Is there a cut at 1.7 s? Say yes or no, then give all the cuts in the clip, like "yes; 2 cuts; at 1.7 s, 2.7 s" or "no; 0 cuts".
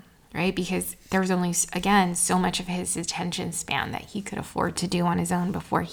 no; 0 cuts